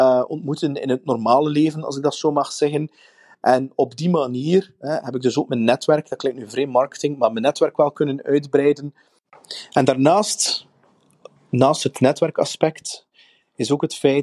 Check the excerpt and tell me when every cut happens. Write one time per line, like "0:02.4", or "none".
none